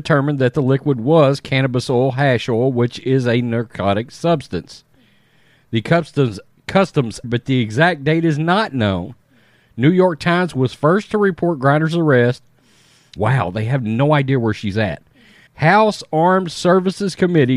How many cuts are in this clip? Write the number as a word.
three